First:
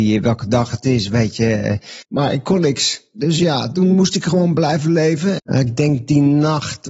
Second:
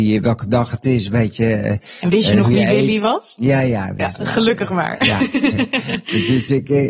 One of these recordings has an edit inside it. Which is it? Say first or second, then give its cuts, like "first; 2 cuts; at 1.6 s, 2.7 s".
first; 2 cuts; at 2.0 s, 5.4 s